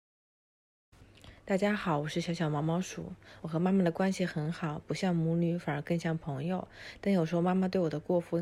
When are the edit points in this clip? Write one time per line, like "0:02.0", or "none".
none